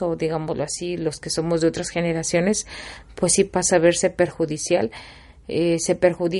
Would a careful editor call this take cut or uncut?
uncut